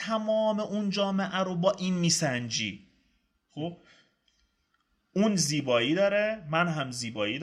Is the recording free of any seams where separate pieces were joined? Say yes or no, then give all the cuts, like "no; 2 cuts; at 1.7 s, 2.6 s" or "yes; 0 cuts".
yes; 0 cuts